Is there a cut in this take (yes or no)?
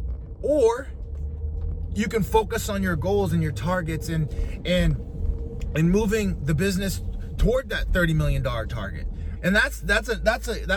yes